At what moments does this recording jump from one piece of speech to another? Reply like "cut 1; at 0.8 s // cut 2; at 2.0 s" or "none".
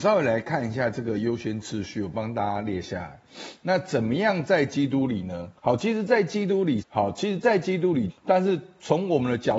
cut 1; at 5.6 s // cut 2; at 6.8 s // cut 3; at 8.1 s